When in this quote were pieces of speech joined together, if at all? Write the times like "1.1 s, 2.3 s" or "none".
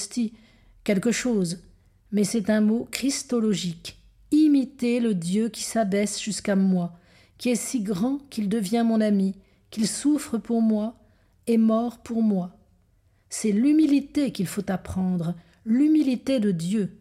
none